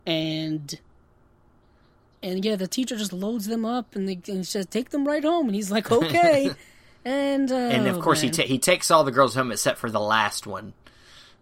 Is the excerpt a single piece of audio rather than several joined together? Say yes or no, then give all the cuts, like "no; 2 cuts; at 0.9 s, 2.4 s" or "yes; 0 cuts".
yes; 0 cuts